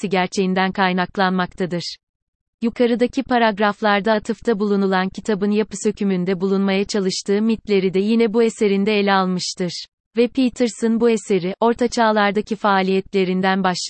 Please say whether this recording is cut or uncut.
cut